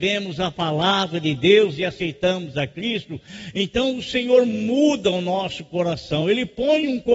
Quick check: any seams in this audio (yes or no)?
no